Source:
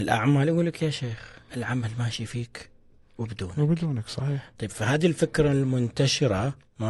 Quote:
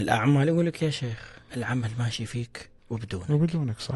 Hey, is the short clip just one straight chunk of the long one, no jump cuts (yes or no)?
no